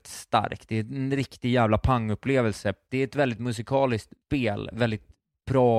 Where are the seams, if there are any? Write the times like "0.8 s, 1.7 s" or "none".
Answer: 2.9 s, 4.2 s